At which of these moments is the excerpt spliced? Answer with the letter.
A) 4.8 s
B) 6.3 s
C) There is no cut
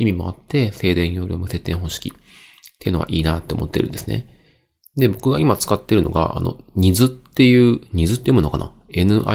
C